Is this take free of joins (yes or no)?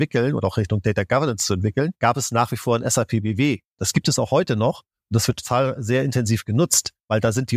yes